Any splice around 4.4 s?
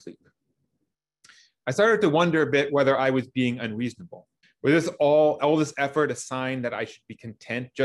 yes; 1 cut; at 4.4 s

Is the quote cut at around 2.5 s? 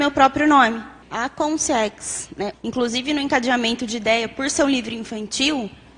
yes; 2 cuts; at 1.0 s, 2.5 s

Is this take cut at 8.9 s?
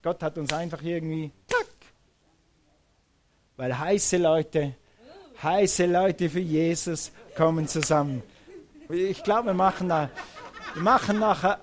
yes; 1 cut; at 8.9 s

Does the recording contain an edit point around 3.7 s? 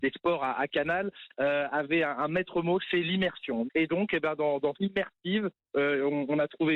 yes; 2 cuts; at 3.7 s, 4.7 s

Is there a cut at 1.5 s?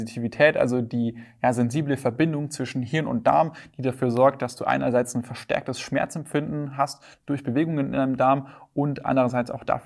no; 0 cuts

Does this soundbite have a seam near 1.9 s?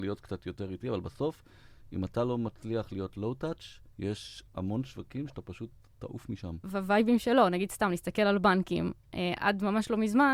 no; 1 cut; at 6.6 s

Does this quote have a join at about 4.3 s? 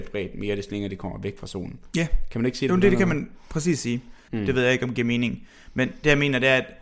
yes; 1 cut; at 4.3 s

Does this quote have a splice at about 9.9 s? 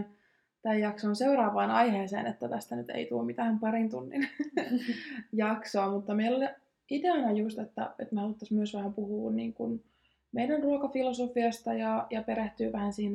no; 0 cuts

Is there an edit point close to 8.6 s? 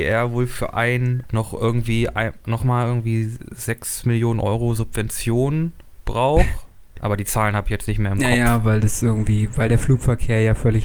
no; 2 cuts; at 1.2 s, 7.0 s

